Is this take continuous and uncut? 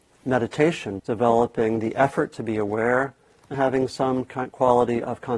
no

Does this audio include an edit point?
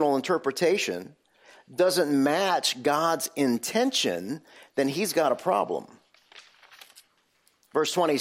no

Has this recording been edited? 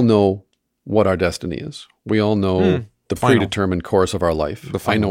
no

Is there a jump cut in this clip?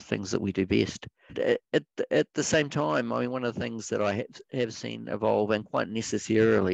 yes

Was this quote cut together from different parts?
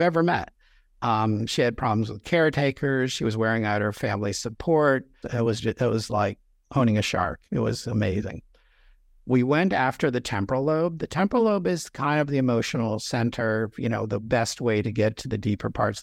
yes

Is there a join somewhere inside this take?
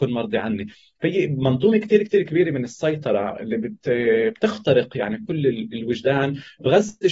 no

